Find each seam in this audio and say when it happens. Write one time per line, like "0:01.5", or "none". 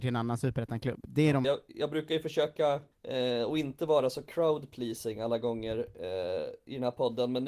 0:01.4
0:02.9